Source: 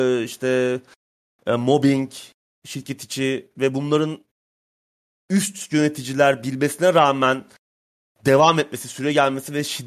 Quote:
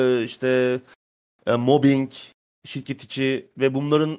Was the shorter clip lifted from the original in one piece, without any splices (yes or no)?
yes